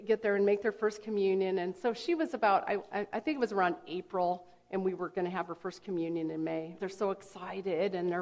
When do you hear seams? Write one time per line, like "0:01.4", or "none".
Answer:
0:06.8